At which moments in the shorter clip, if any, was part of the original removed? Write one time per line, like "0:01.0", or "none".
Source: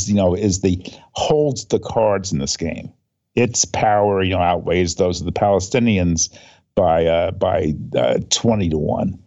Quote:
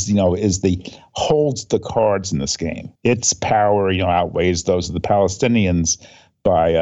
0:03.0